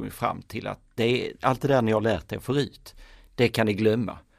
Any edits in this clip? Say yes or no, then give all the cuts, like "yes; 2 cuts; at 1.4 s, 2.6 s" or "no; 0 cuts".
no; 0 cuts